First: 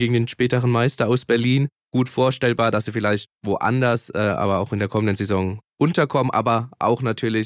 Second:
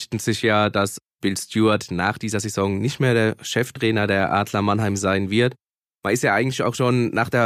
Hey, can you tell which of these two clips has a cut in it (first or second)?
first